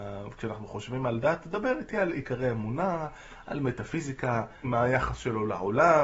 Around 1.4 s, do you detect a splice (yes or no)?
no